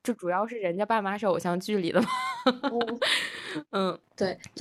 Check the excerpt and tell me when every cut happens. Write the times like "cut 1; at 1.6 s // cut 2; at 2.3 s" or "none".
none